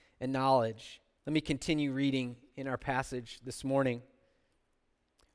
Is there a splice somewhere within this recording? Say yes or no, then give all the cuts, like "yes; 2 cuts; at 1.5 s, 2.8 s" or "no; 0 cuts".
yes; 1 cut; at 1.2 s